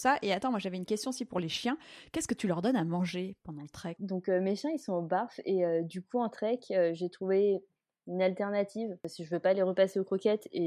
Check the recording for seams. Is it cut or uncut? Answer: cut